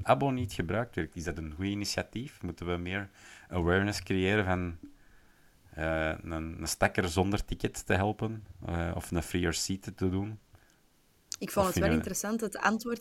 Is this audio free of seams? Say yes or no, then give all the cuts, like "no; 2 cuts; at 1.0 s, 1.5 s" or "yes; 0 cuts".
yes; 0 cuts